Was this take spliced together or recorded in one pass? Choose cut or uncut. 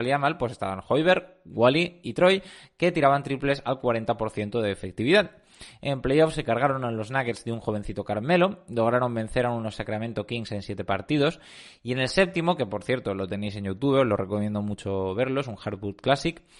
uncut